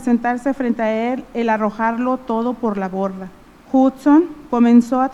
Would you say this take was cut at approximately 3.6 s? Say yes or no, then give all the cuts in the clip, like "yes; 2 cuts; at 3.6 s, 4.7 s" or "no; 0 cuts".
yes; 1 cut; at 3.6 s